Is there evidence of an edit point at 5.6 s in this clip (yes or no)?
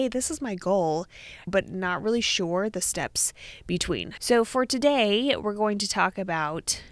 no